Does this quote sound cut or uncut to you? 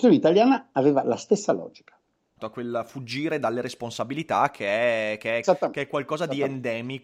cut